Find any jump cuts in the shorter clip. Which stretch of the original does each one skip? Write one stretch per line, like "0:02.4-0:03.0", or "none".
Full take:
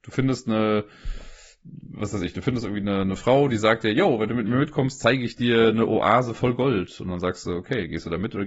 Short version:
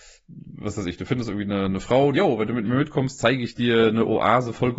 0:03.5-0:03.9